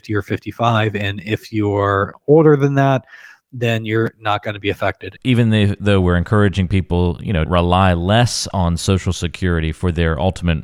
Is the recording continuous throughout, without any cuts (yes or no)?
no